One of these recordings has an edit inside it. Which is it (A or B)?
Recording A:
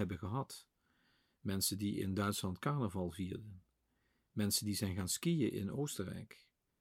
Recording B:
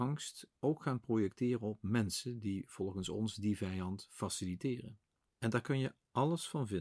B